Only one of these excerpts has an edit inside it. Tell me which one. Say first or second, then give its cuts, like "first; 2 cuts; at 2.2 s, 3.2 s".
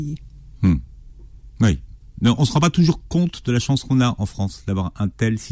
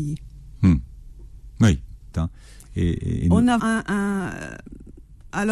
second; 2 cuts; at 2.1 s, 3.6 s